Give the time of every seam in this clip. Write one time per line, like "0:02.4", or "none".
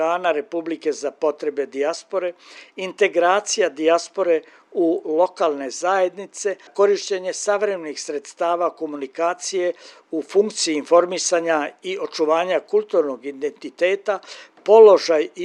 0:06.7